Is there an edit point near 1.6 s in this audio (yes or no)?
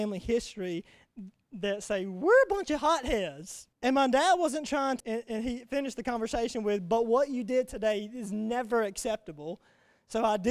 no